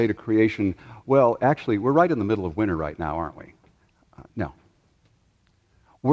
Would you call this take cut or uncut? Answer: uncut